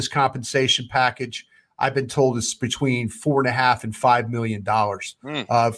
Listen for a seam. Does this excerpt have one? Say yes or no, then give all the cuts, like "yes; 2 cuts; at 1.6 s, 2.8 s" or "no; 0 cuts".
no; 0 cuts